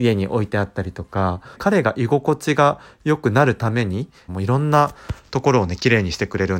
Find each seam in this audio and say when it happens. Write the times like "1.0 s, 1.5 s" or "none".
1.5 s, 4.3 s